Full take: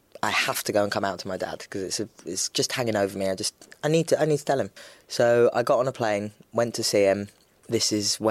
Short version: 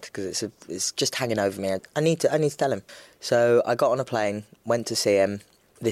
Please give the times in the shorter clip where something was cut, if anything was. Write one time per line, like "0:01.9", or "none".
0:01.8